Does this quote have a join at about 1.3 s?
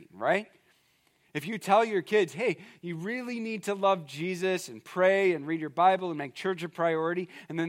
no; 0 cuts

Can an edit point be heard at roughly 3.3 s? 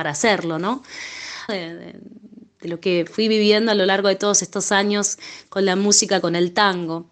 no; 1 cut; at 1.5 s

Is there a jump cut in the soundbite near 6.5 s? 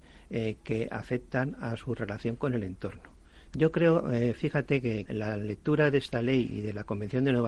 no; 2 cuts; at 3.5 s, 5.1 s

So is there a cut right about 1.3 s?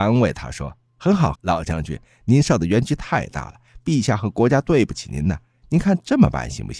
yes; 1 cut; at 1.3 s

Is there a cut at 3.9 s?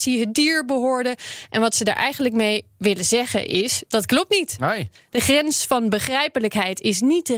yes; 1 cut; at 3.9 s

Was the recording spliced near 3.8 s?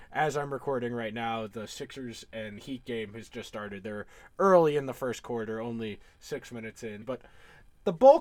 no; 1 cut; at 7.0 s

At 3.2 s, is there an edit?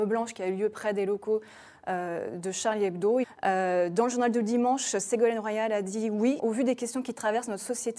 yes; 2 cuts; at 3.2 s, 6.4 s

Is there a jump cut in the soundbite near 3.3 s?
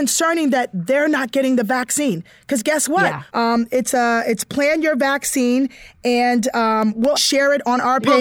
yes; 2 cuts; at 3.3 s, 7.2 s

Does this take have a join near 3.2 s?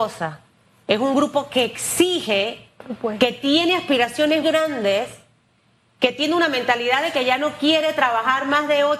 no; 1 cut; at 4.4 s

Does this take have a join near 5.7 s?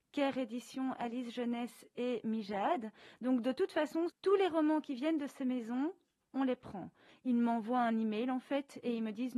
no; 2 cuts; at 4.1 s, 7.1 s

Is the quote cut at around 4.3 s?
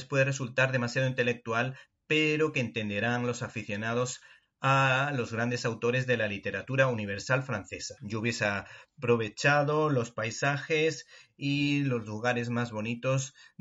no; 1 cut; at 8.0 s

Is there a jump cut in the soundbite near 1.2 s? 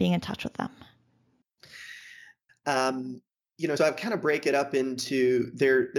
no; 2 cuts; at 2.5 s, 3.8 s

